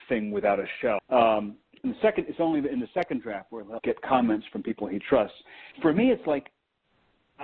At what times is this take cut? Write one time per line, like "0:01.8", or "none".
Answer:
0:01.0
0:03.8
0:05.7